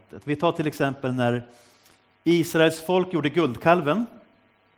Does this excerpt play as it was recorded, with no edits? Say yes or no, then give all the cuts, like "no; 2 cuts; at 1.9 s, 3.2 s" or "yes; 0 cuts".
yes; 0 cuts